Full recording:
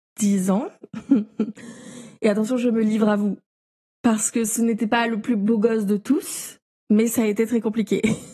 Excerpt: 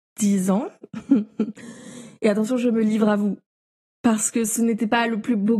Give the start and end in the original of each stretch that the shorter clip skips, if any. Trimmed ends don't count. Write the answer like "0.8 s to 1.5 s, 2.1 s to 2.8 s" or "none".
none